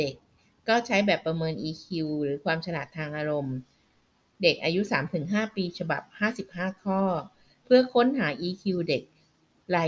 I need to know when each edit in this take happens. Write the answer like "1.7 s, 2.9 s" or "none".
none